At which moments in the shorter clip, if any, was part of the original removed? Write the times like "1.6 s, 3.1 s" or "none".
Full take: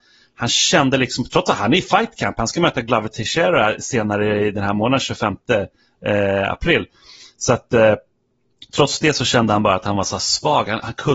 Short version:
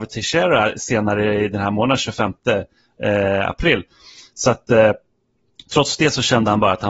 none